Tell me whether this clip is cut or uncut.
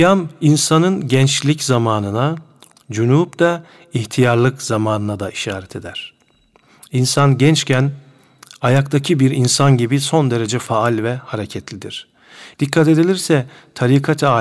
cut